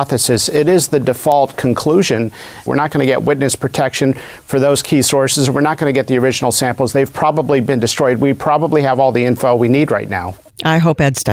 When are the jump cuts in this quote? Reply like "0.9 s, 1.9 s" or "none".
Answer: 2.7 s

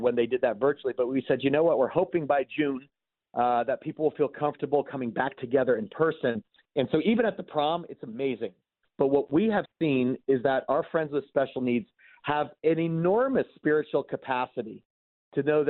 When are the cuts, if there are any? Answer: 6.6 s, 8.8 s

